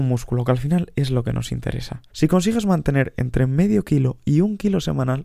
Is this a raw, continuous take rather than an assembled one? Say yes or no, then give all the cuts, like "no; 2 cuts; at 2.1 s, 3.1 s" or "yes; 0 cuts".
no; 1 cut; at 2.1 s